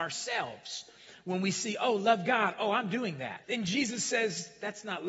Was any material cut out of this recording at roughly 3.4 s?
yes; 1 cut; at 3.4 s

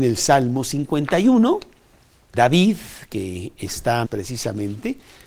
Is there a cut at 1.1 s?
no; 2 cuts; at 2.3 s, 4.0 s

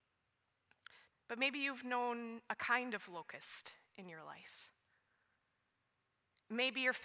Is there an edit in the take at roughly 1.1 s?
yes; 1 cut; at 1.1 s

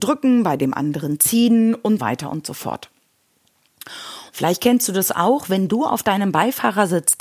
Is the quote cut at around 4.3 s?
yes; 2 cuts; at 2.0 s, 4.3 s

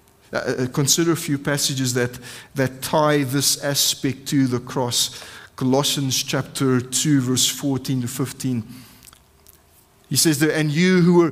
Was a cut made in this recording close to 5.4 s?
no; 0 cuts

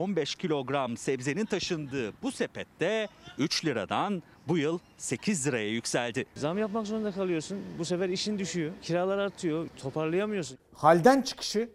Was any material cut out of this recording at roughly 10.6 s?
yes; 1 cut; at 10.6 s

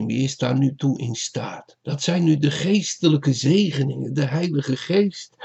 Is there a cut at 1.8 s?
yes; 1 cut; at 1.8 s

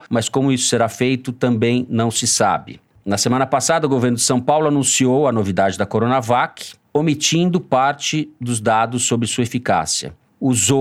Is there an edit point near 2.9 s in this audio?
yes; 1 cut; at 2.9 s

